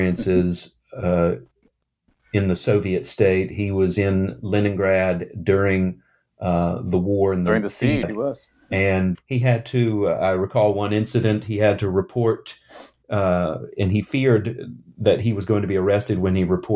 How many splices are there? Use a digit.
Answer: 2